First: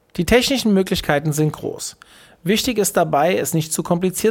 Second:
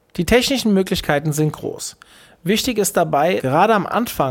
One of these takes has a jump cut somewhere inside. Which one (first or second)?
second